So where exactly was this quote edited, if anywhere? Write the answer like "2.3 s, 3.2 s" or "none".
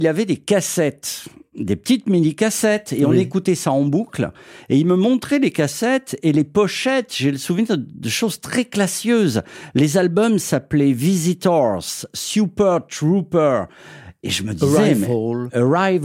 none